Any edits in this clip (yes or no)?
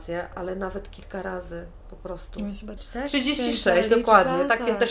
yes